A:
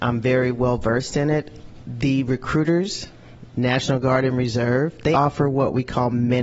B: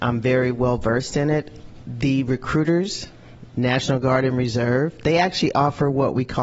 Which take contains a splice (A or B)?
A